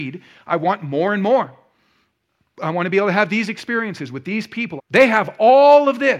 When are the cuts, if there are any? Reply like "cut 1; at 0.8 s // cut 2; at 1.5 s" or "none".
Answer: cut 1; at 4.8 s